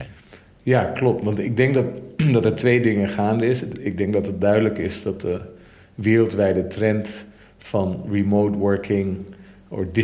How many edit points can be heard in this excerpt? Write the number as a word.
zero